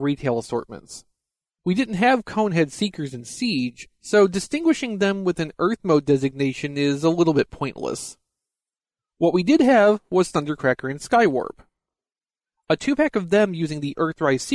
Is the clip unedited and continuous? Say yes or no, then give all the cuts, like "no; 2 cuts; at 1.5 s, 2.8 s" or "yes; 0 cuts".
no; 1 cut; at 1.6 s